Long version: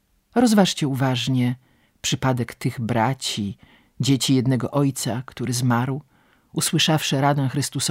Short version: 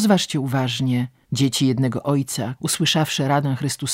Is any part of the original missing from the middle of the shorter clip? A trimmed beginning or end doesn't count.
yes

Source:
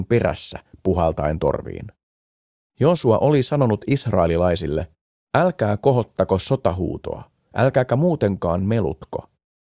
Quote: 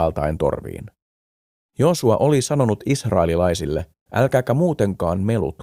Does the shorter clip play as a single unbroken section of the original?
no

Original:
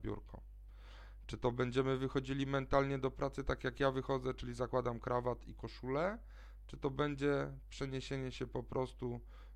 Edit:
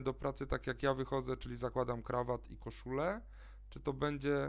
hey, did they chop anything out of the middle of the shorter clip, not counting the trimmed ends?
no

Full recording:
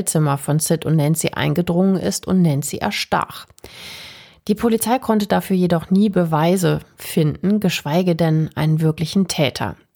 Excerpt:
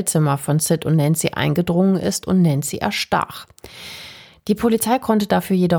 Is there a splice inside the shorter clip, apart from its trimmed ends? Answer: no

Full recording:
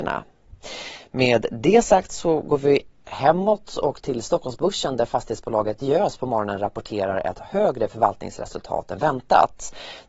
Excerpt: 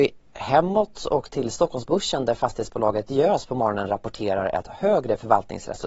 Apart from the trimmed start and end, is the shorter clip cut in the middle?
no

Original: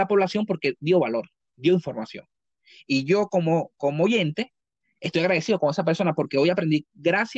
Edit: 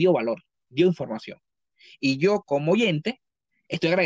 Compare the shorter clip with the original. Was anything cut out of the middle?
yes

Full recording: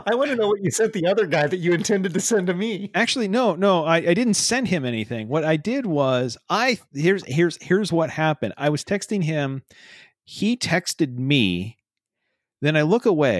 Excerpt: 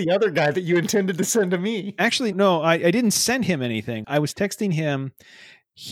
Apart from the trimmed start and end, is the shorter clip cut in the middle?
yes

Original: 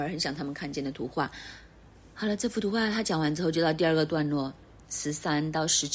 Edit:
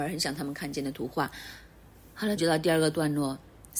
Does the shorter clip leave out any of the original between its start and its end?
yes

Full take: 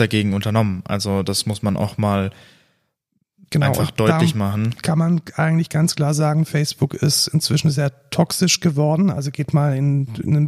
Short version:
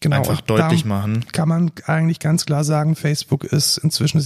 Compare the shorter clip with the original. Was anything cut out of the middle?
no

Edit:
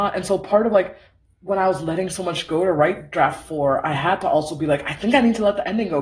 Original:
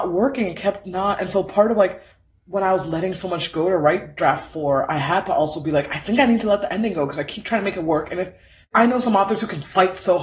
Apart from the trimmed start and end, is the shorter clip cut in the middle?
no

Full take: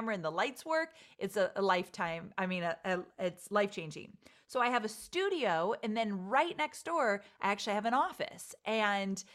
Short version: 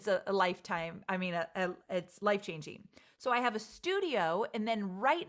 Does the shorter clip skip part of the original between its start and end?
no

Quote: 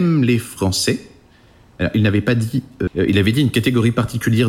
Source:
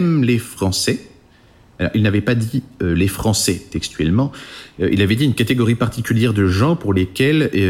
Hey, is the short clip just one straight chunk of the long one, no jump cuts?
no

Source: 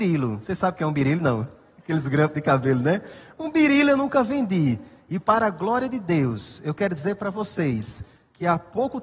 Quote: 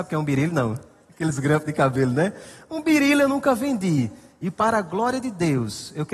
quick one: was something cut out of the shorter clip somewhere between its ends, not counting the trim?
no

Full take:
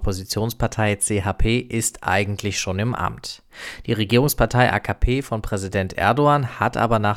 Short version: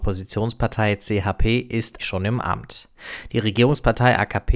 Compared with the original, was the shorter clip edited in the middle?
yes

